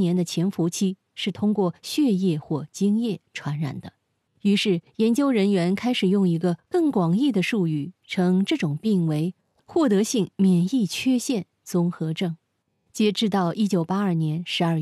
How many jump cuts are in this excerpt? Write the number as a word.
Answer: one